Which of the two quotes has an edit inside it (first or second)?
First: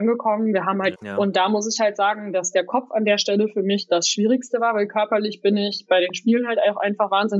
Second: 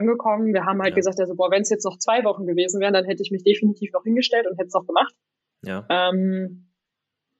first